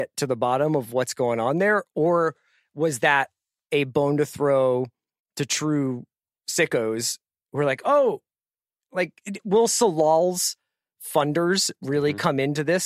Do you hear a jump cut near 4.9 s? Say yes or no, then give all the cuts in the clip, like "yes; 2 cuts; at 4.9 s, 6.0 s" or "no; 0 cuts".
no; 0 cuts